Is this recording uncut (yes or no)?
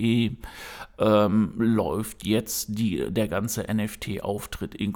yes